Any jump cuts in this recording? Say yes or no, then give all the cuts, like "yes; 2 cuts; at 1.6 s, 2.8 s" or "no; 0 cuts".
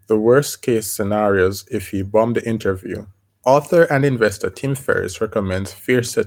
yes; 1 cut; at 3.3 s